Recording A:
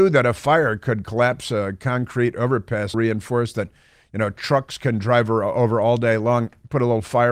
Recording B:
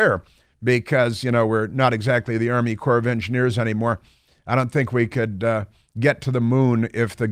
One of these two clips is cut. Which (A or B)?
A